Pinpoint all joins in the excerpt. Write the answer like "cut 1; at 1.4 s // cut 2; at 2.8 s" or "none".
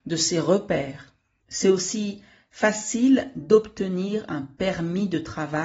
cut 1; at 1.4 s